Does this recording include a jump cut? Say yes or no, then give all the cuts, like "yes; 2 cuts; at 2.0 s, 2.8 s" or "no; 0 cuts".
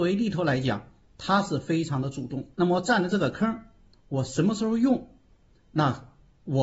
yes; 1 cut; at 2.5 s